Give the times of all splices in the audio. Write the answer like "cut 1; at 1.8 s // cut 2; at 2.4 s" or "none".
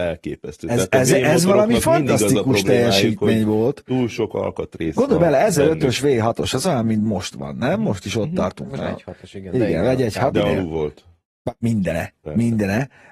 cut 1; at 10.3 s